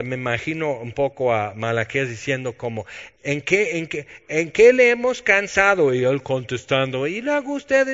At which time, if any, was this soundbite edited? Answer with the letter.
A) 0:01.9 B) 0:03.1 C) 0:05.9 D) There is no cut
B